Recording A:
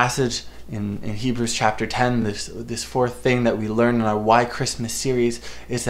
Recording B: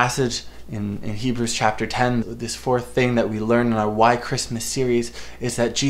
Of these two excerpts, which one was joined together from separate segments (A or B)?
B